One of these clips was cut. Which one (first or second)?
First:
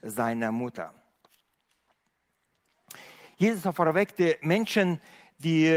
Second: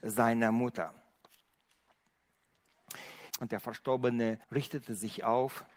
second